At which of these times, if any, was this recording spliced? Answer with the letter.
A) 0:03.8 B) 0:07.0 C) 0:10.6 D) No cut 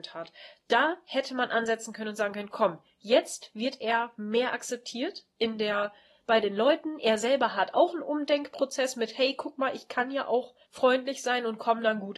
C